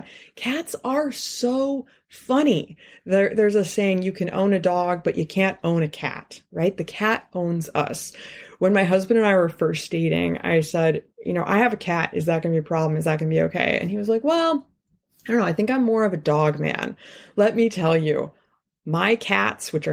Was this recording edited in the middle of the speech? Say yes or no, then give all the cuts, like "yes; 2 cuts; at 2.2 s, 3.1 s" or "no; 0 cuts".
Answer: no; 0 cuts